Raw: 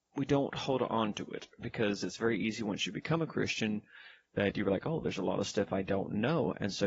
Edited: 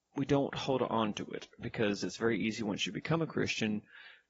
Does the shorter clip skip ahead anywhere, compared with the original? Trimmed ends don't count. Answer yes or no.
no